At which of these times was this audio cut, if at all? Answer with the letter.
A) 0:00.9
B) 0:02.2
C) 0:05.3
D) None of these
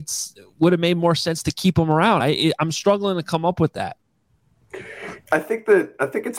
D